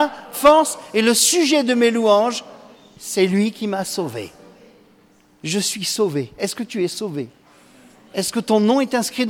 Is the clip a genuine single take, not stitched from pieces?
yes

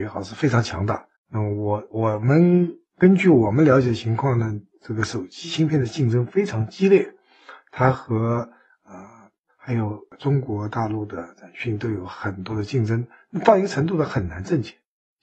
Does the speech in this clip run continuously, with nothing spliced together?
no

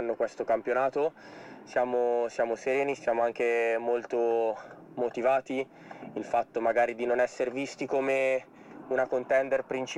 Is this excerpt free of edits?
no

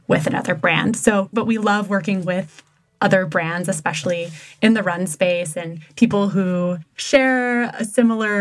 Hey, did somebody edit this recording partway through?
yes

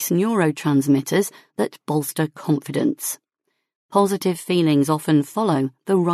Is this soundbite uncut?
yes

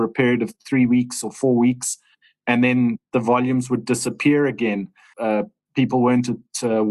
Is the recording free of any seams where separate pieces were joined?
no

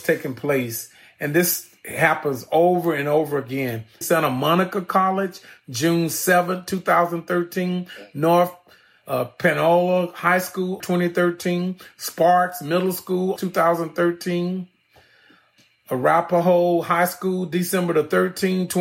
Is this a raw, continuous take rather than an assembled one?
no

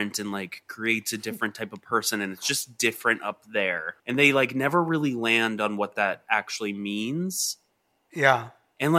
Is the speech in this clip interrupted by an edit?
yes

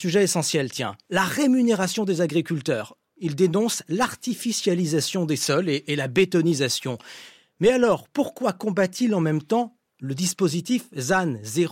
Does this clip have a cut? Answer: yes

